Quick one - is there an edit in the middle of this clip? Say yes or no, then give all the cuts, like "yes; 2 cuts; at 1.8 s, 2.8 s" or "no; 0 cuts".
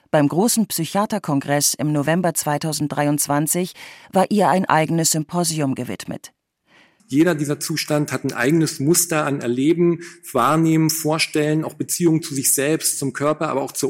yes; 1 cut; at 7.0 s